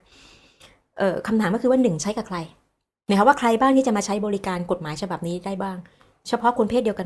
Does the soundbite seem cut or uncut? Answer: uncut